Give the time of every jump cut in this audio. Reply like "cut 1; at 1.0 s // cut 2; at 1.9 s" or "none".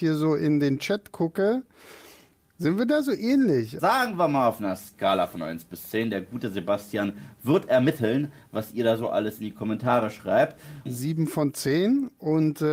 cut 1; at 3.8 s // cut 2; at 10.9 s